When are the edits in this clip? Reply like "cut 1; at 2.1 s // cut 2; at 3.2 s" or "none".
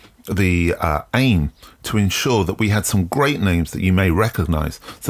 none